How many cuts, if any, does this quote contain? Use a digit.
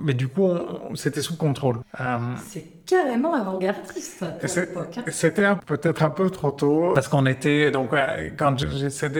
1